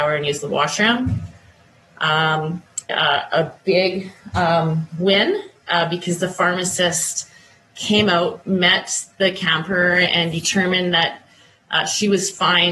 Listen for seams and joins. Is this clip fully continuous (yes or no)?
no